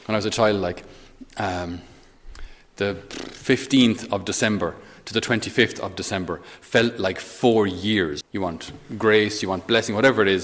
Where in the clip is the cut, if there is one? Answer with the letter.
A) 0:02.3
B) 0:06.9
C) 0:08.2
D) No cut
C